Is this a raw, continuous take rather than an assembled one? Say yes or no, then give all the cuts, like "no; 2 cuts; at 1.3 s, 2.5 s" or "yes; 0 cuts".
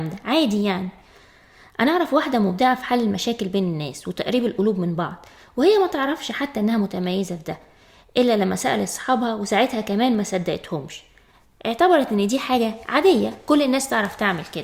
yes; 0 cuts